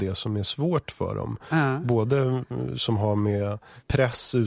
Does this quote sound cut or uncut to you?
uncut